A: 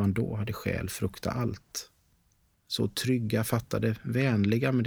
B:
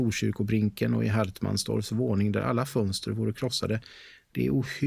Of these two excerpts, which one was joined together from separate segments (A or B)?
A